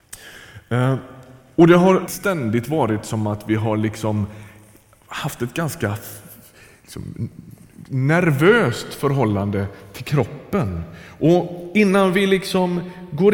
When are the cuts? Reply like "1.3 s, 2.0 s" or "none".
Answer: 2.1 s